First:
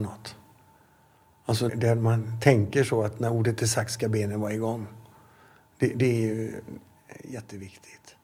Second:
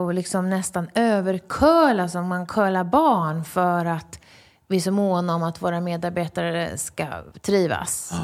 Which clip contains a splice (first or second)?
first